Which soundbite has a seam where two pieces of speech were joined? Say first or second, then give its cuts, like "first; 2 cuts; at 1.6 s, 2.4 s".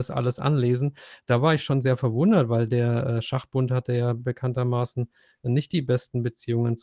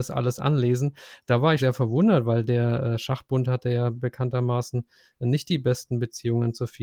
second; 1 cut; at 1.6 s